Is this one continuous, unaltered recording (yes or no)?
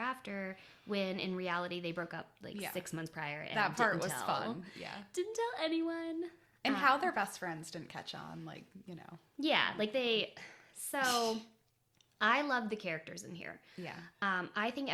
yes